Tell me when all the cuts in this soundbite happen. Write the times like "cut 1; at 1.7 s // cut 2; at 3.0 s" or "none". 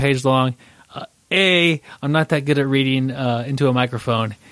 none